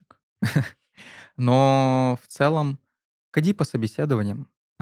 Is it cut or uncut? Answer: uncut